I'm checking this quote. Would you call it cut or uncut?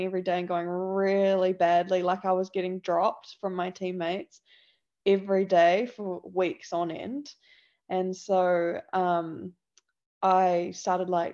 uncut